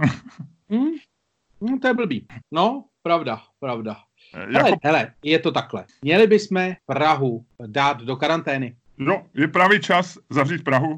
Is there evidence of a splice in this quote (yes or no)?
yes